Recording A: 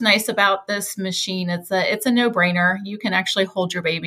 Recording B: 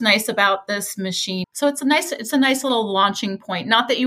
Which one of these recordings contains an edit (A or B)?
B